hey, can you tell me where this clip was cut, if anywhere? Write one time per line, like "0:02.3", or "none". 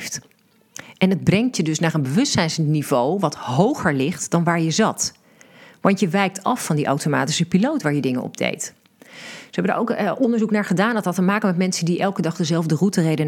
none